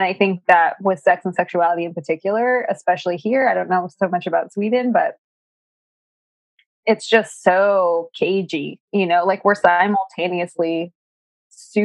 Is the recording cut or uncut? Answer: uncut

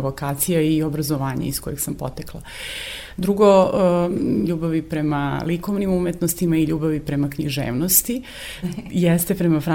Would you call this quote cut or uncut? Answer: cut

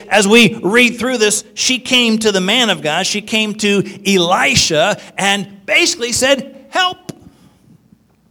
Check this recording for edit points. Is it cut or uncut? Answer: uncut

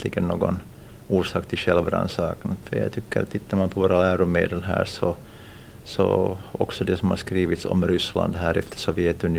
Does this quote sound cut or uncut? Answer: cut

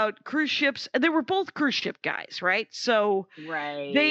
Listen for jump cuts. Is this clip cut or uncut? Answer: uncut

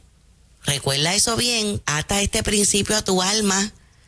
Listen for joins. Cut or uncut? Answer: cut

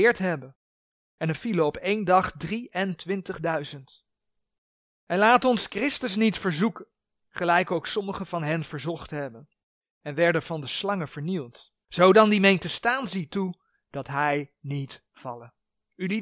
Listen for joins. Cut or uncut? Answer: cut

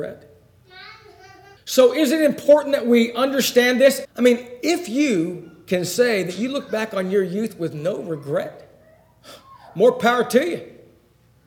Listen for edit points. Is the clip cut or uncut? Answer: cut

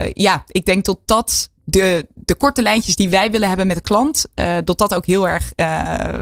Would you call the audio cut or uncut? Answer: cut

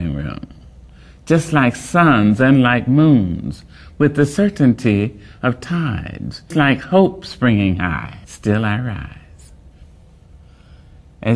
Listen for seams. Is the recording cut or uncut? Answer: cut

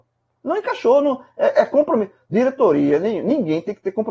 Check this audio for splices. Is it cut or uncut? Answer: uncut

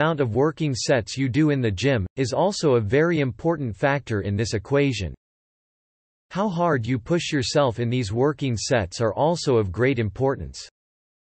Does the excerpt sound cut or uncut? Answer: uncut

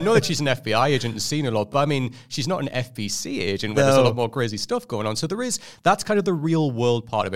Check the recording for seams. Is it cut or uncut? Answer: uncut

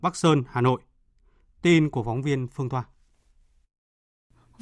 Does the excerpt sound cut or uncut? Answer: uncut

